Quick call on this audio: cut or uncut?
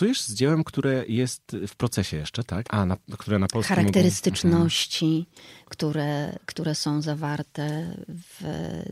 cut